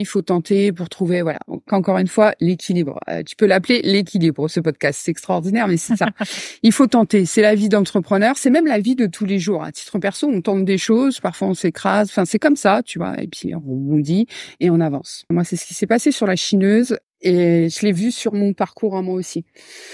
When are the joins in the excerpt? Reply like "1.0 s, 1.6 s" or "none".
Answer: 15.3 s, 17.0 s